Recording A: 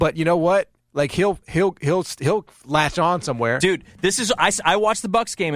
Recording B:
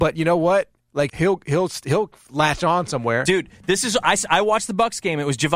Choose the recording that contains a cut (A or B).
B